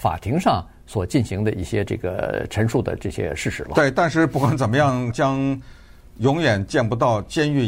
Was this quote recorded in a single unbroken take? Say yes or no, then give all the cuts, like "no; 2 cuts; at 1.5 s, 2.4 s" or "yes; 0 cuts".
no; 1 cut; at 5.1 s